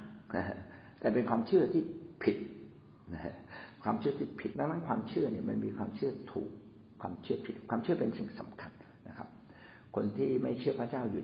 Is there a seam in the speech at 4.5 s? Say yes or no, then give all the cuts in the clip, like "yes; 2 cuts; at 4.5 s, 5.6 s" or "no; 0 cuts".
yes; 1 cut; at 4.5 s